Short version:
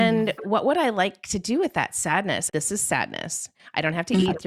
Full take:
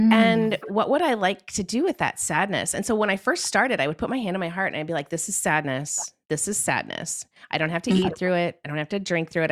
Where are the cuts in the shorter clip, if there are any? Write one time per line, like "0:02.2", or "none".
0:02.5